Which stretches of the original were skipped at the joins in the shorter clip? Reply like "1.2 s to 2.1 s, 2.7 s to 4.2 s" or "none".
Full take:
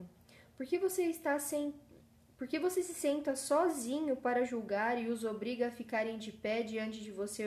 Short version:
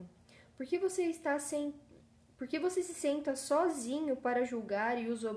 none

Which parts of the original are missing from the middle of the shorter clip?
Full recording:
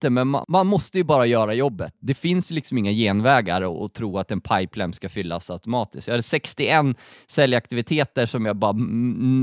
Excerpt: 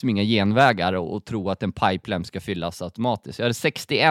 none

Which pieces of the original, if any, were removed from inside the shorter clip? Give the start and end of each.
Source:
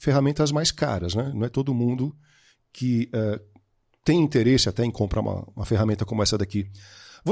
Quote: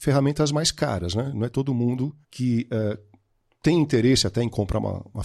2.2 s to 2.6 s

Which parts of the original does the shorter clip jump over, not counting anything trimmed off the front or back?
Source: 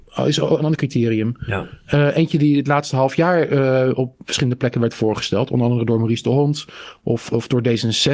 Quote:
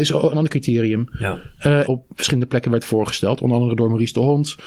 2.1 s to 4.0 s

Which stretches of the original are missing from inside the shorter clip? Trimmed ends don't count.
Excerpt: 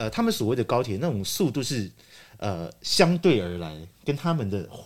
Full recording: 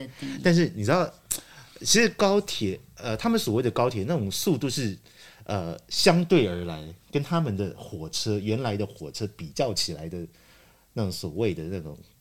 none

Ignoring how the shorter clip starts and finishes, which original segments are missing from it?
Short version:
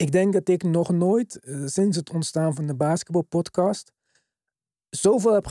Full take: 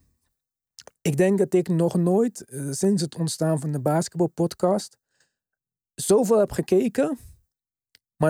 none

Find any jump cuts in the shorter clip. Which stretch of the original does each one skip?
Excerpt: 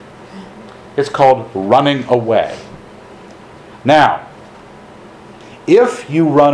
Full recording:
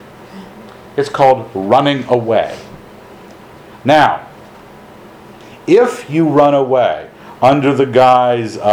none

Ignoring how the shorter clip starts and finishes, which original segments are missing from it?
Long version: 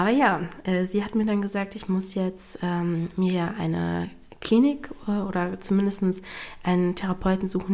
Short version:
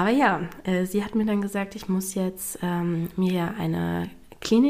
none

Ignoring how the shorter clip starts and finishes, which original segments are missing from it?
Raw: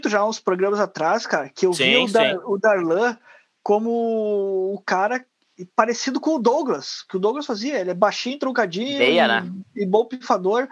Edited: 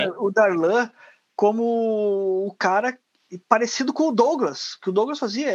none

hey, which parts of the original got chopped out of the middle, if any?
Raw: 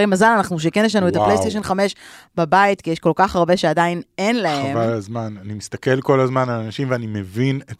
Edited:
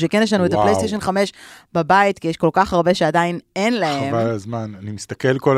none

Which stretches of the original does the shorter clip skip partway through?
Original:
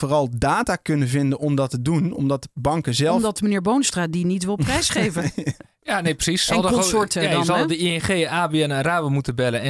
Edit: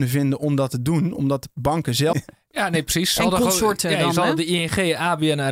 3.1 s to 5.4 s

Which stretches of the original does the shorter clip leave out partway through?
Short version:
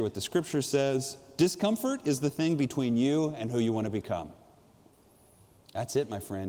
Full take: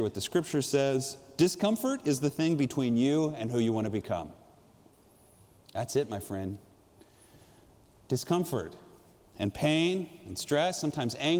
none

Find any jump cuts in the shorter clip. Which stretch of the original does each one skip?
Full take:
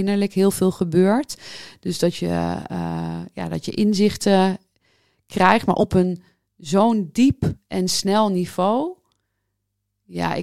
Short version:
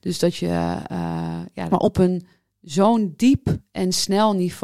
3.5 s to 5.7 s

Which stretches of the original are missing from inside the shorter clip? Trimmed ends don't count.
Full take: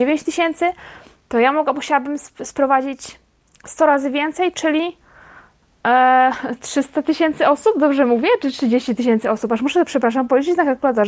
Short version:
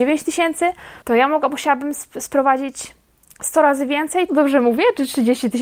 1.0 s to 1.2 s, 4.5 s to 7.7 s

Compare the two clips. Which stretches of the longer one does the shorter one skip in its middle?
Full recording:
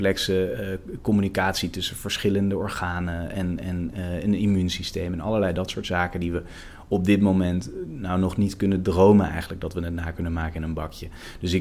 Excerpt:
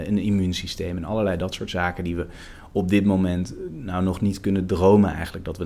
none

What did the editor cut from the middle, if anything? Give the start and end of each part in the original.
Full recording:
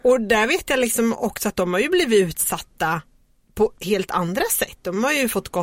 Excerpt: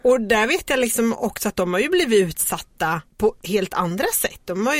3.1 s to 3.4 s

